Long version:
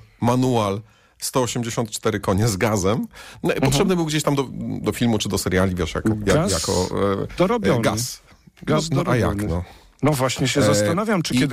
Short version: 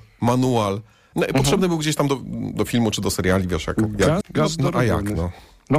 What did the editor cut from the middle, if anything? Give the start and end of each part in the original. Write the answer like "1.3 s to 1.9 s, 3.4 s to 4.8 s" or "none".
1.1 s to 3.4 s, 6.5 s to 8.5 s